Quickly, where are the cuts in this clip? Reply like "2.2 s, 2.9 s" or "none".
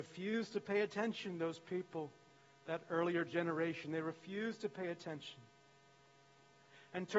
none